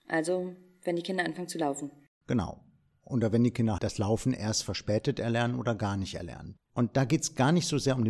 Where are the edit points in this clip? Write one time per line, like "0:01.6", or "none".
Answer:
0:03.8
0:06.6